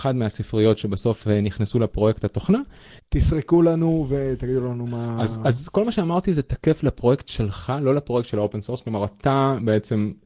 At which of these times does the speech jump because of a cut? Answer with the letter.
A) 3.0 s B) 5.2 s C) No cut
A